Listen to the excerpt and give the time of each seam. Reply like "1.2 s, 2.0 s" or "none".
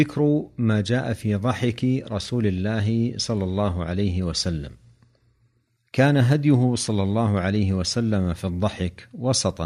none